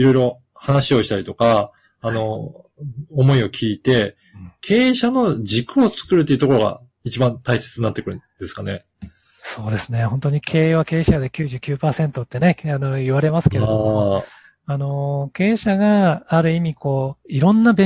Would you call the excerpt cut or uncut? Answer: uncut